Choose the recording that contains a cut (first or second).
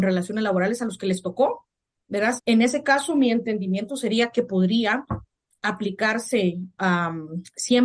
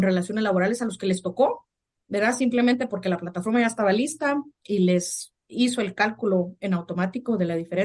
first